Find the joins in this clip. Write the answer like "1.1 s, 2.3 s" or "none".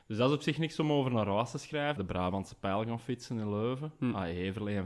2.0 s

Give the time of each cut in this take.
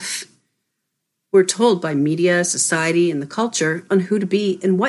none

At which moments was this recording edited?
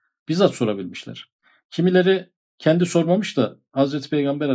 none

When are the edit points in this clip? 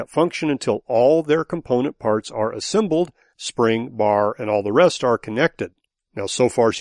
3.3 s

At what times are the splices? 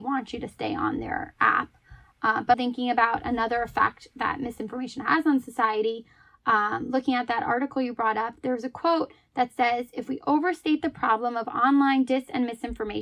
2.5 s

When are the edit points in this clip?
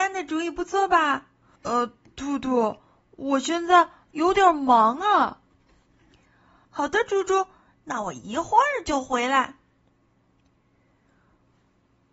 1.6 s, 6.6 s

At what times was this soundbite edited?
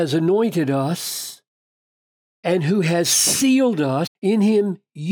4.1 s

